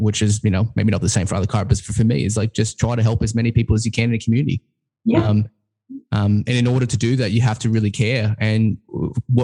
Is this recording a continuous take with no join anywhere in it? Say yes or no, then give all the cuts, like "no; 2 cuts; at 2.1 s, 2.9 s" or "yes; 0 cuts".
yes; 0 cuts